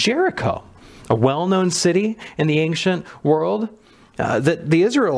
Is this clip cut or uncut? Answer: uncut